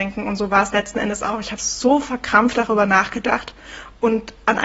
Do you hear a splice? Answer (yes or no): no